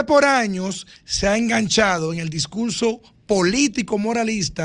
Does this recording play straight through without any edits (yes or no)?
yes